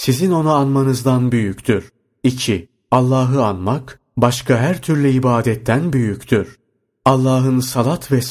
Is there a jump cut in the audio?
no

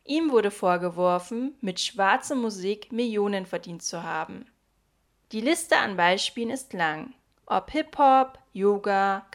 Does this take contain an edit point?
yes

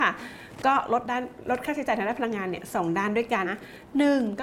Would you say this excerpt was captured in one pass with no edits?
no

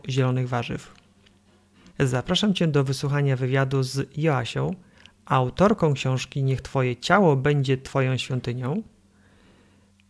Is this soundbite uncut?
no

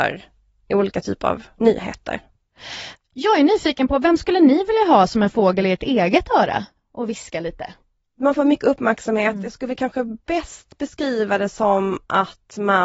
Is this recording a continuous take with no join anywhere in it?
no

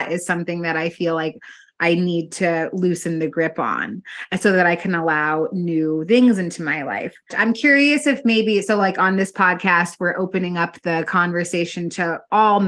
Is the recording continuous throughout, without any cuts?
no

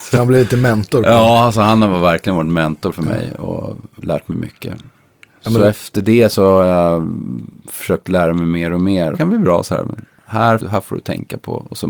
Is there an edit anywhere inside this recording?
yes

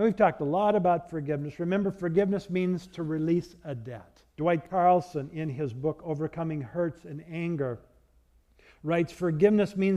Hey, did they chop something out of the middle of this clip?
yes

